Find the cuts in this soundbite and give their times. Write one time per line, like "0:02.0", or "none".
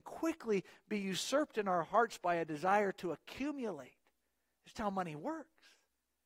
0:04.7

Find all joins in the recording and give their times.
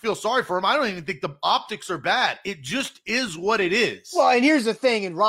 none

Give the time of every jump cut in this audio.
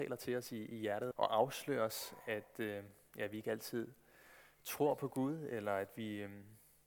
0:01.1

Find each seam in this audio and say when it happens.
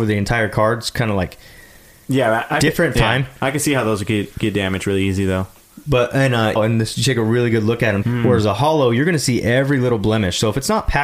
0:02.9
0:06.6
0:08.0

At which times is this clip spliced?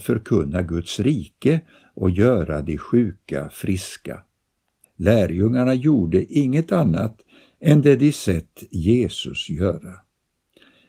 0:04.8

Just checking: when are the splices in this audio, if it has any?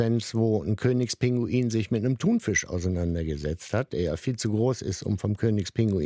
none

